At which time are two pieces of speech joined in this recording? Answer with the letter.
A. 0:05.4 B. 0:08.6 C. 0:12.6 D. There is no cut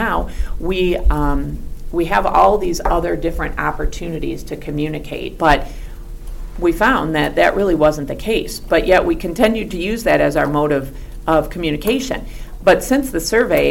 A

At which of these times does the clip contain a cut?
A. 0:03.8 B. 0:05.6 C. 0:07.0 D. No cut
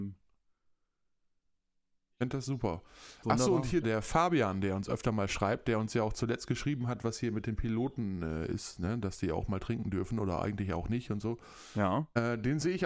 A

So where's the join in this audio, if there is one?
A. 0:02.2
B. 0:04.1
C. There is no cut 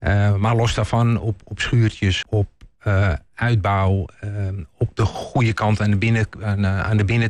A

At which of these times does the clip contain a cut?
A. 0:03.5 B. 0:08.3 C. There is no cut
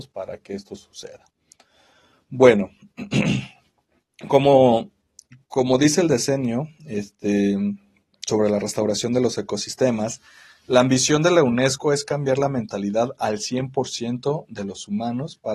C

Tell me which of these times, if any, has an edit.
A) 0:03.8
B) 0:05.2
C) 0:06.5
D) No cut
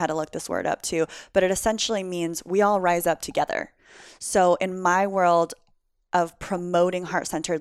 D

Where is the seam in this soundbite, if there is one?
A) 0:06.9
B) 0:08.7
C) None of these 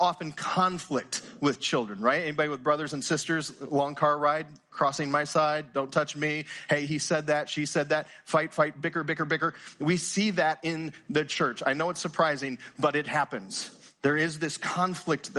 B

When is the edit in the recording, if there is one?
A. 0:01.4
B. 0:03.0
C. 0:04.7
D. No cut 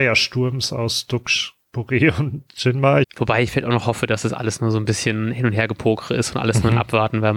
B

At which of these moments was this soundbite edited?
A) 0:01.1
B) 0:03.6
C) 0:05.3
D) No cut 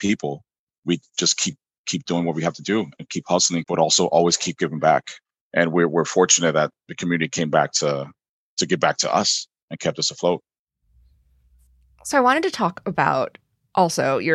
B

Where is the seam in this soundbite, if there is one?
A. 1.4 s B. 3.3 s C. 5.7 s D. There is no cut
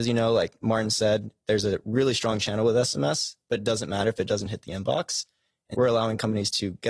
C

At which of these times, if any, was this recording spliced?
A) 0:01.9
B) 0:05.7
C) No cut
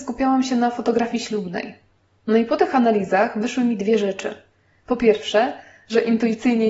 C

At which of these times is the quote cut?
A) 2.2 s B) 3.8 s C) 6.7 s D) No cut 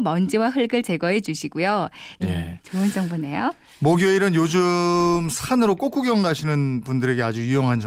A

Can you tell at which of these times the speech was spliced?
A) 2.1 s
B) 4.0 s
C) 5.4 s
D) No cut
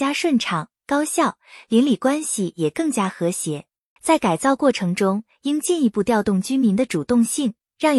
B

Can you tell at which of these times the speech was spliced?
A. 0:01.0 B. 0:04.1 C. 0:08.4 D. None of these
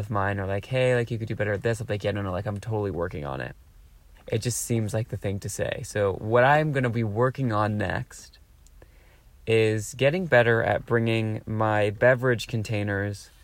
B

